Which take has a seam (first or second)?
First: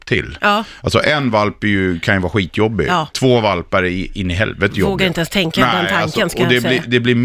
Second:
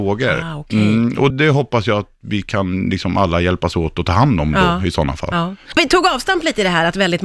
second